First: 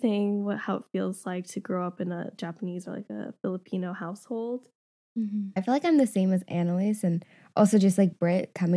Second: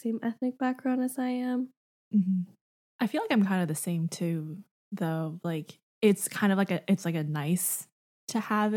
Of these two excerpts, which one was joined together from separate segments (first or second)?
first